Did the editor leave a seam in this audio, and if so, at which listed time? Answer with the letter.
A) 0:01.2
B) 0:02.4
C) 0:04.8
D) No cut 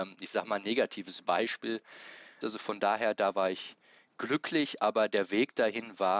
B